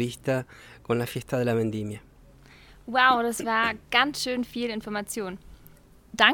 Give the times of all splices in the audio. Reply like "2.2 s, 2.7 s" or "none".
none